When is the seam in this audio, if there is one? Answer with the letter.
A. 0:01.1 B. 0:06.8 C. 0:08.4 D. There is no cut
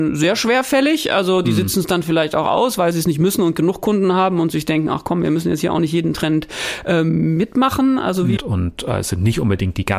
C